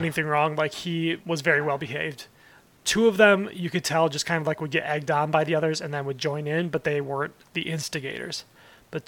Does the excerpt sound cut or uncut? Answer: cut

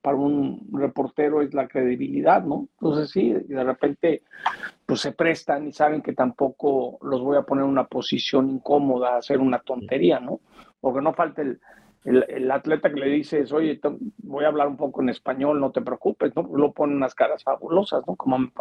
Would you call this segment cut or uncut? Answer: uncut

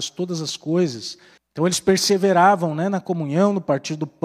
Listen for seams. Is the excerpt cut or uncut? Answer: cut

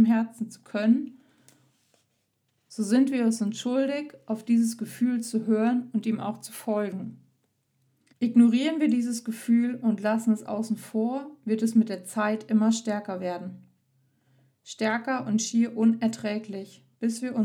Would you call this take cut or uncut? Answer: cut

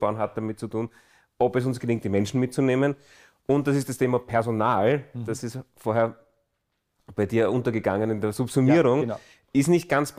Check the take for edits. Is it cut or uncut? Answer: uncut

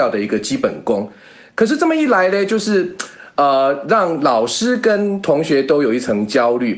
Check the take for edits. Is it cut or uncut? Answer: uncut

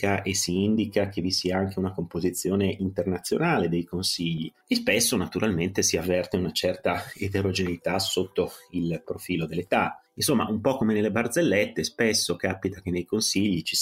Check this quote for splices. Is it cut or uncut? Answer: uncut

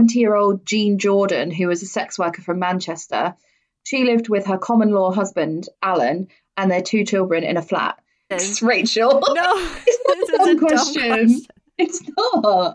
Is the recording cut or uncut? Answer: cut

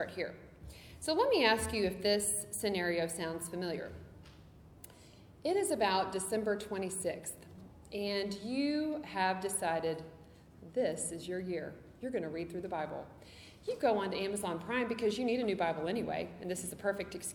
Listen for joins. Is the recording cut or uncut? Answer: uncut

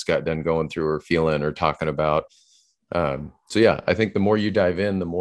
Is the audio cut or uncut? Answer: uncut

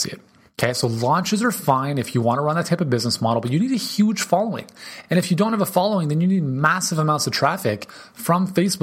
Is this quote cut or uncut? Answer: uncut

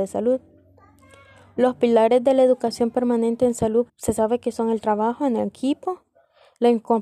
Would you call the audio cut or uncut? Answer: cut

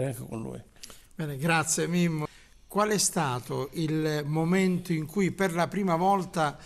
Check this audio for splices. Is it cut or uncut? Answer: uncut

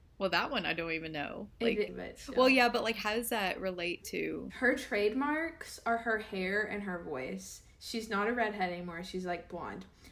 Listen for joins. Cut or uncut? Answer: cut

